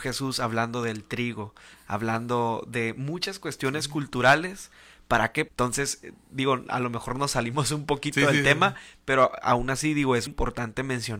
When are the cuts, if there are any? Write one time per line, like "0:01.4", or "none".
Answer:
0:05.5
0:10.3